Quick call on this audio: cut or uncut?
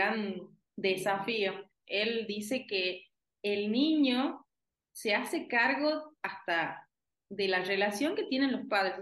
cut